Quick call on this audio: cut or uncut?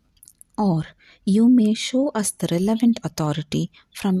uncut